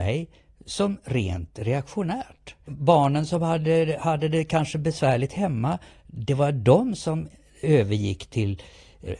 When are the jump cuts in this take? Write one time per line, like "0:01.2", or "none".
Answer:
0:02.7
0:07.6